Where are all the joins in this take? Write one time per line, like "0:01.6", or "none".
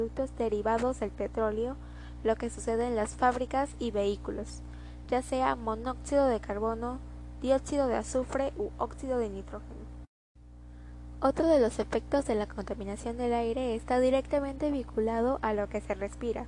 none